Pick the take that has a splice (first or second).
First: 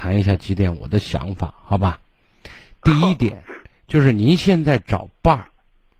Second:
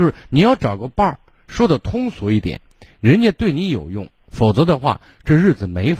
second